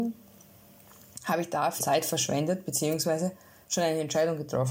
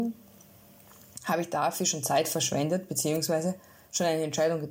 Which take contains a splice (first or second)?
first